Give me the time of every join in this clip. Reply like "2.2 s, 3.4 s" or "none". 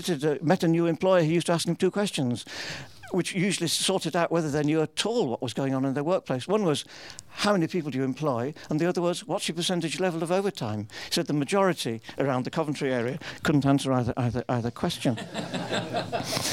none